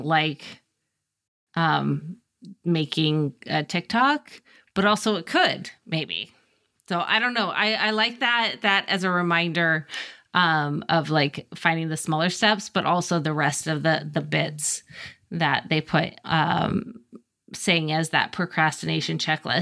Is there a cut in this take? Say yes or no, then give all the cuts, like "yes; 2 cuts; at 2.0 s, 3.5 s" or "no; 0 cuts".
no; 0 cuts